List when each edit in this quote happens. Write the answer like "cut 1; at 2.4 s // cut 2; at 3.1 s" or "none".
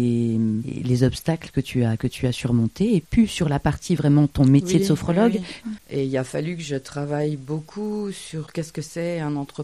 cut 1; at 5.6 s